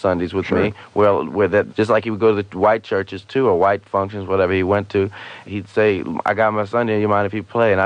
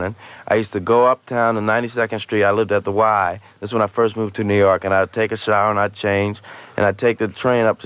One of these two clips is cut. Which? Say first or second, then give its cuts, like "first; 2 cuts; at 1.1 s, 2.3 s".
first; 2 cuts; at 1.7 s, 5.4 s